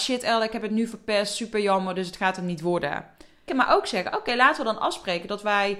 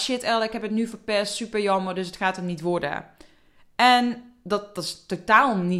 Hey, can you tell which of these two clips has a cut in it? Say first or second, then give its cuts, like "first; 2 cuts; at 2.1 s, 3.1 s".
first; 1 cut; at 3.5 s